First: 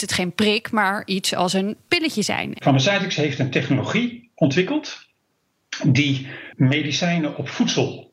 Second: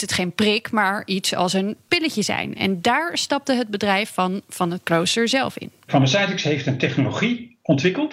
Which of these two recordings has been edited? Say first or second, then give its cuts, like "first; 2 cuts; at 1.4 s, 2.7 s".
first; 1 cut; at 2.6 s